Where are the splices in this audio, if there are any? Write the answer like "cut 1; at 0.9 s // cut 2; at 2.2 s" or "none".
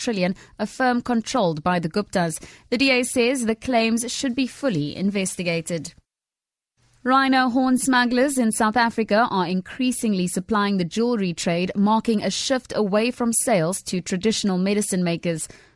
none

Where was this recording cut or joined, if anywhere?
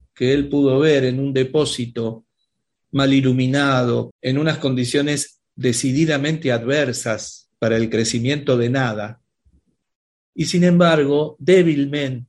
cut 1; at 4.1 s

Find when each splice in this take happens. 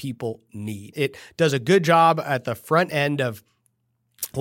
cut 1; at 0.9 s

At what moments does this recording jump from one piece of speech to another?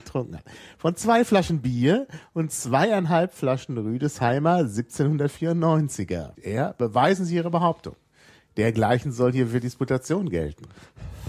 cut 1; at 6.3 s

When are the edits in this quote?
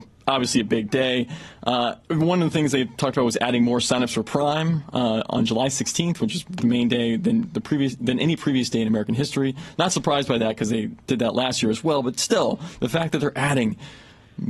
cut 1; at 2.0 s

